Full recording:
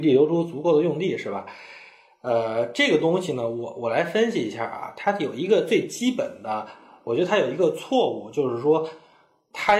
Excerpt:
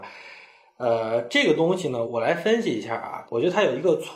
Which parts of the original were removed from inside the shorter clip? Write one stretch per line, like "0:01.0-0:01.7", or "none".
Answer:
0:03.5-0:03.7
0:04.9-0:07.0